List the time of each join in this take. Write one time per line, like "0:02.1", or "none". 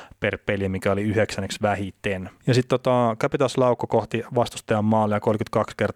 0:02.4